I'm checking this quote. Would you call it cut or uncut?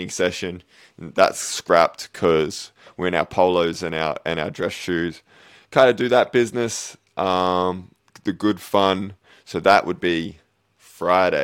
uncut